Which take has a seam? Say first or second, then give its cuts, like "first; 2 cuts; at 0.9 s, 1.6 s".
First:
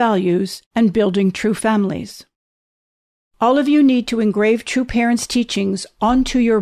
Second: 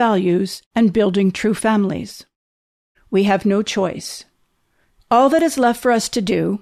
second; 1 cut; at 2.9 s